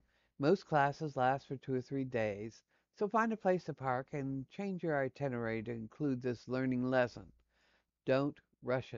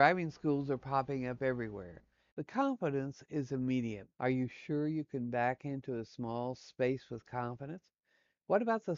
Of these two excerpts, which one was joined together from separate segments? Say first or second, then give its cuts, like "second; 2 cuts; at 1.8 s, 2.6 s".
second; 2 cuts; at 2.3 s, 4.1 s